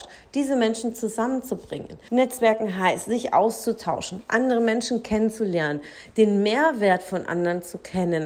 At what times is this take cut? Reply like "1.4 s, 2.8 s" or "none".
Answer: 2.1 s